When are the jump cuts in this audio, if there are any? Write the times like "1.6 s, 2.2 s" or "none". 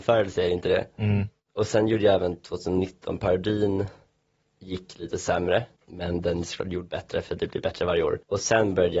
none